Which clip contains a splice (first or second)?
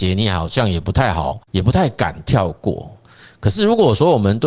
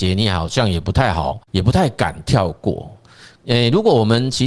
second